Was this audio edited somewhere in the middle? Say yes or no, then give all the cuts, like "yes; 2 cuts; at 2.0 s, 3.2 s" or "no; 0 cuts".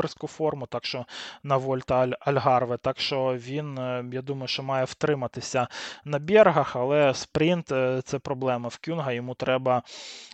no; 0 cuts